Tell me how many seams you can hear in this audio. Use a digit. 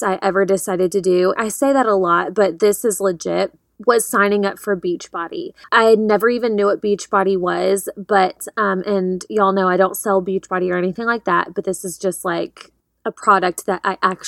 1